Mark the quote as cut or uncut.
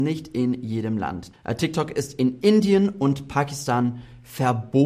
cut